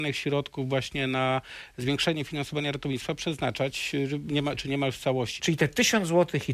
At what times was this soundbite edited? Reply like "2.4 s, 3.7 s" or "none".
5.4 s